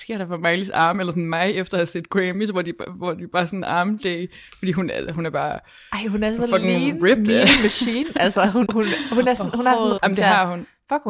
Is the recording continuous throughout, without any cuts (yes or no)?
no